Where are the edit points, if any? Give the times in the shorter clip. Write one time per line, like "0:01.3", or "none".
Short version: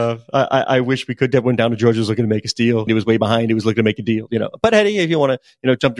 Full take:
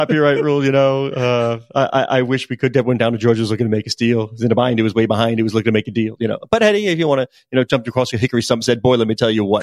0:02.9

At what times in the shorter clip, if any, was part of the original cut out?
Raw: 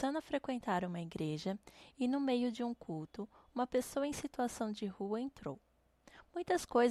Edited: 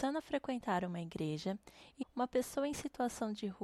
0:02.0

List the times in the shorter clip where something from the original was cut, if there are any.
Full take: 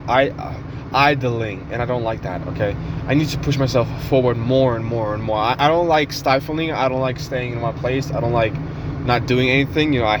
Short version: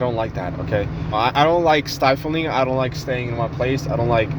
0:01.1

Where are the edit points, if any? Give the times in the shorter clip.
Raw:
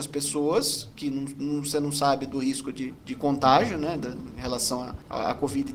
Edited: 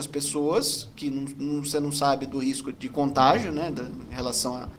0:02.7

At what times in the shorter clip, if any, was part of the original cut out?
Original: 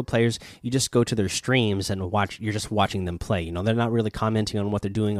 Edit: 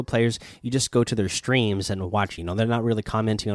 0:02.4

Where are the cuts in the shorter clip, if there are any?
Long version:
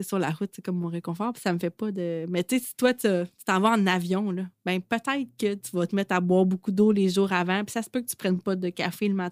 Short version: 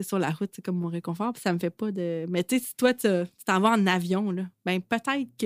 none

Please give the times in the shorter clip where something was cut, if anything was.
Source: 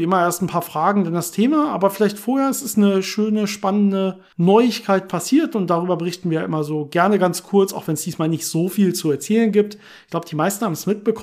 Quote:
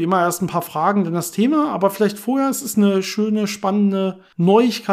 none

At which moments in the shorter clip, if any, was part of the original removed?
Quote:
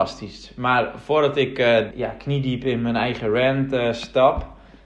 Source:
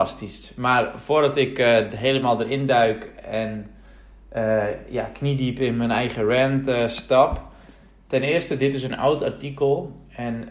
0:01.9

